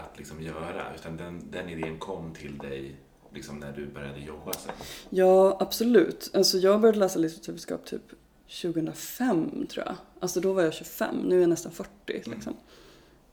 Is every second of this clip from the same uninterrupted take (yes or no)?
no